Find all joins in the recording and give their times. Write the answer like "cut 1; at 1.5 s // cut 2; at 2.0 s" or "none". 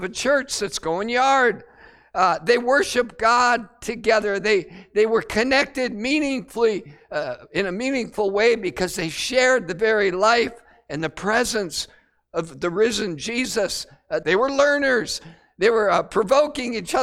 cut 1; at 14.2 s